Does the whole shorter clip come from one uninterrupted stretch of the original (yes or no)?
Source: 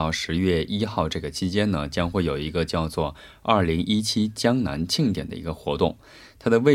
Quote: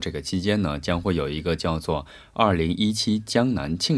yes